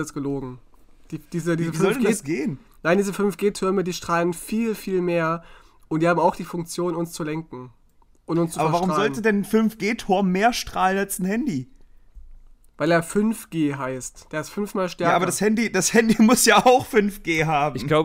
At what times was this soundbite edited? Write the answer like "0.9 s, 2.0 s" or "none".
none